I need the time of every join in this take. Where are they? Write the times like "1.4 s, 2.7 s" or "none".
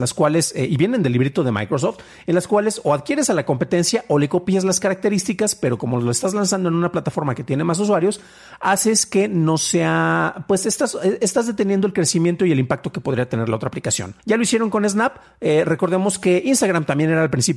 14.2 s